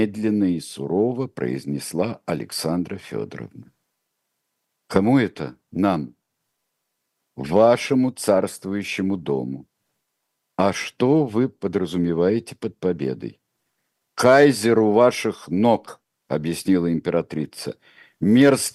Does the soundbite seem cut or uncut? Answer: uncut